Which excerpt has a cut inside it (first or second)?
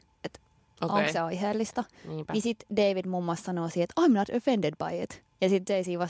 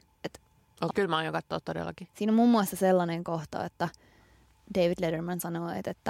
second